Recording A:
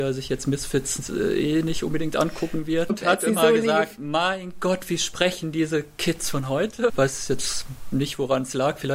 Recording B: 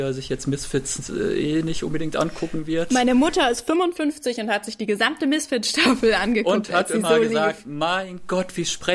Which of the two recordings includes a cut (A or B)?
A